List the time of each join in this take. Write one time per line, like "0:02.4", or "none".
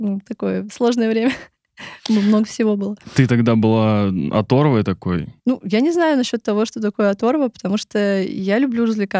0:05.4

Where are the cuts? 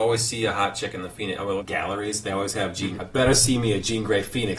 0:01.6
0:03.0

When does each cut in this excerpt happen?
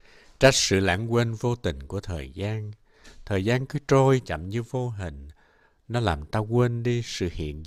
0:04.2

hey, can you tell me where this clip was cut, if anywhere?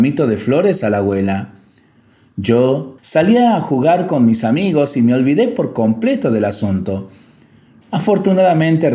0:03.0
0:07.8

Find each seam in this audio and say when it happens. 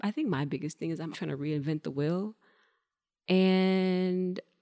0:01.1

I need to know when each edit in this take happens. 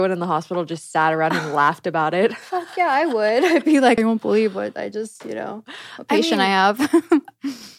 0:04.0

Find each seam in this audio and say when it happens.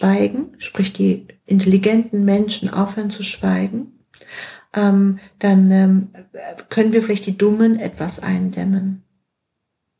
none

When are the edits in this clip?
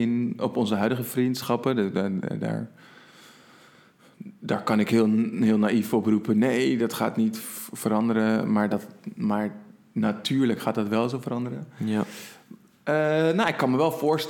none

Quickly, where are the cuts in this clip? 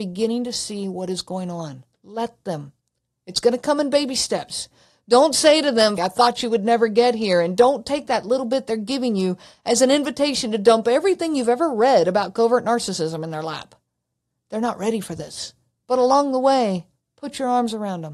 0:06.0
0:15.8

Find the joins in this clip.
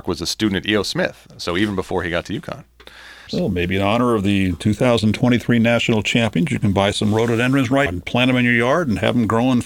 0:03.3
0:07.9

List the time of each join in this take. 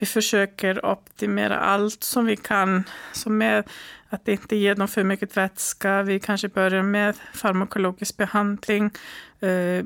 none

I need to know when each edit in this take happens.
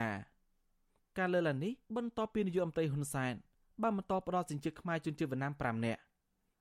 0:01.8

